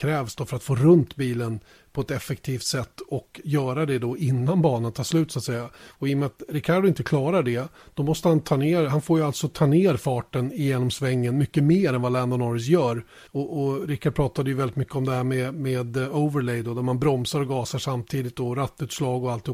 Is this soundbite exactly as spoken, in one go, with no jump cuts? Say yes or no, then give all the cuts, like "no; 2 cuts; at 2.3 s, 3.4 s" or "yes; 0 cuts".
no; 1 cut; at 13.3 s